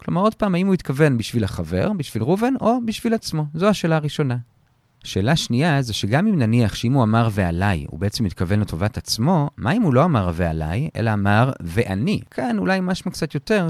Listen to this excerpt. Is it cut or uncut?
uncut